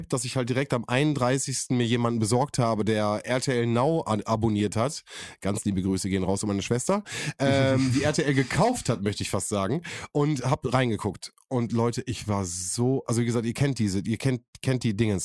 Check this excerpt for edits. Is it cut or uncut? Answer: uncut